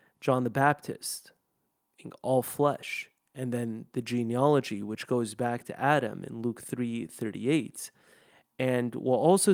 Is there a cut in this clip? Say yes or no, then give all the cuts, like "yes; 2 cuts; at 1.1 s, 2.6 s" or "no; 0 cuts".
no; 0 cuts